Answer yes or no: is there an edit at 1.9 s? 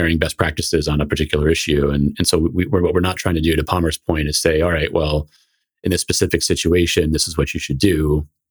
no